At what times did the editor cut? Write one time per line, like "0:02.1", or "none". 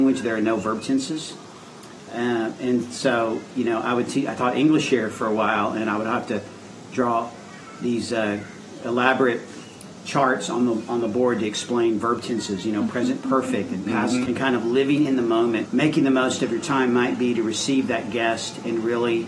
0:14.3
0:15.7